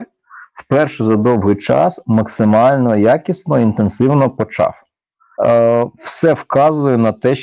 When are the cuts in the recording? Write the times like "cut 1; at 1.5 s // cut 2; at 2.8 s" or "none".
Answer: cut 1; at 5.4 s